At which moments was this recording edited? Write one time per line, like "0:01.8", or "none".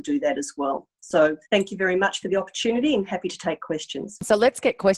0:01.4